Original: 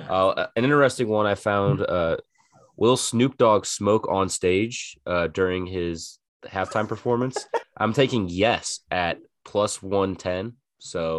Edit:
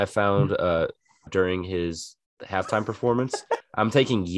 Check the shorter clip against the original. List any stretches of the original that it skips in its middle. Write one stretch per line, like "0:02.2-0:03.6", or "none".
0:02.6-0:05.3